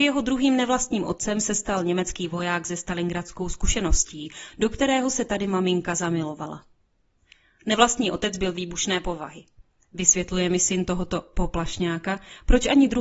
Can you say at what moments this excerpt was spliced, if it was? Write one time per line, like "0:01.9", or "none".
none